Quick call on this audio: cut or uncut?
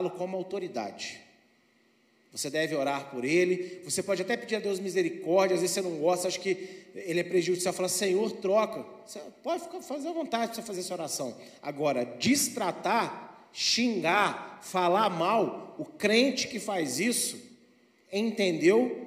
uncut